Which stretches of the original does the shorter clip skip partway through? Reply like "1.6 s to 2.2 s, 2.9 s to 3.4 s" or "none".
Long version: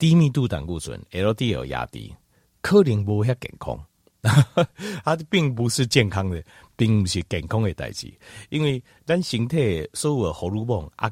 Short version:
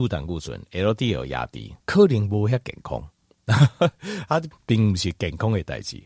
2.2 s to 2.6 s, 5.3 s to 6.6 s

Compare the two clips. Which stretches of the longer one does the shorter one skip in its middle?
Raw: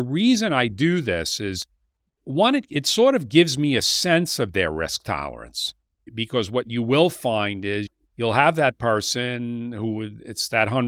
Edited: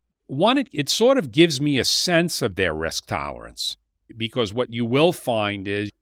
none

